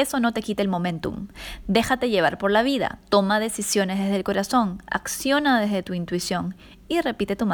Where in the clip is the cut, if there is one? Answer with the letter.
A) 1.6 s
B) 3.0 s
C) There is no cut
C